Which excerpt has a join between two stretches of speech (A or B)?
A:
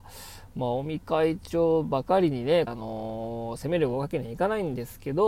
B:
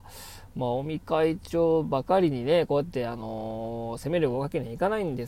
A